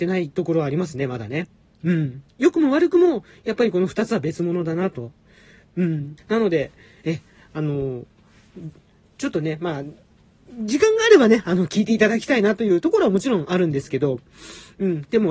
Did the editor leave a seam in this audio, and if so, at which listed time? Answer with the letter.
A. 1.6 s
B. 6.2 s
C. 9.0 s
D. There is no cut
B